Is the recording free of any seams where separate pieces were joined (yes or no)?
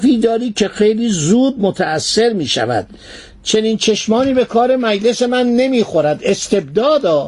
yes